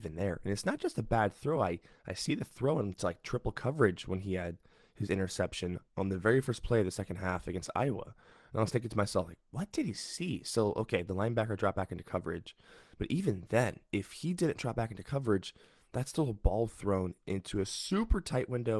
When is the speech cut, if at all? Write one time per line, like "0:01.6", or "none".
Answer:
none